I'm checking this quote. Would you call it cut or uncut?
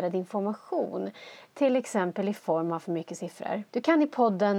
cut